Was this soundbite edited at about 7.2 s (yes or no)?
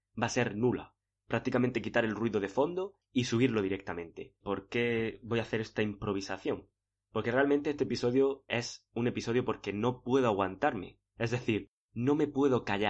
no